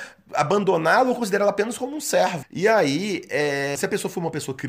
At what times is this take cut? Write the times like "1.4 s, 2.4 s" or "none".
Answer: 2.4 s, 3.8 s